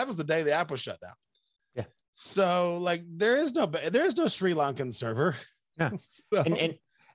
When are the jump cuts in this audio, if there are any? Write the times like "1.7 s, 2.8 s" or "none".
1.6 s